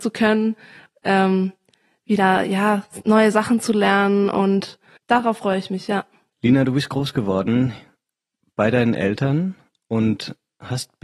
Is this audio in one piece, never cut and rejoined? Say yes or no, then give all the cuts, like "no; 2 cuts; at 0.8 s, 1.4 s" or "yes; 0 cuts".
no; 1 cut; at 5.0 s